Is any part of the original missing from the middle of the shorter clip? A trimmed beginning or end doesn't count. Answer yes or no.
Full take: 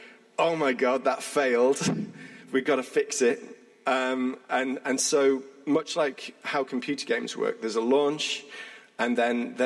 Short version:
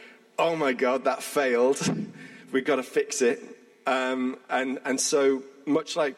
no